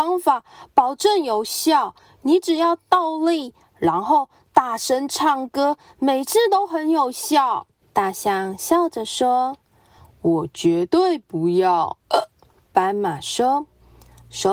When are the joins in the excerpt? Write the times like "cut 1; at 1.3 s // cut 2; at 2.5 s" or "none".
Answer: cut 1; at 3.6 s // cut 2; at 7.8 s